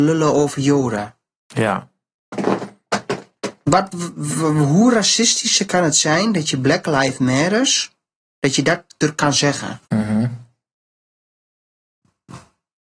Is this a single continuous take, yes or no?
no